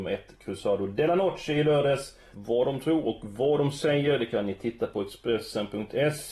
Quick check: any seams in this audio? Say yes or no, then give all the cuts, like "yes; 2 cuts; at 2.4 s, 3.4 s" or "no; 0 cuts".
yes; 1 cut; at 2.3 s